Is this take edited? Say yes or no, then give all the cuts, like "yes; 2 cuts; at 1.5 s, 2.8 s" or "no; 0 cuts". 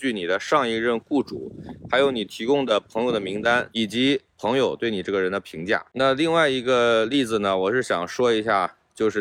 yes; 1 cut; at 3.7 s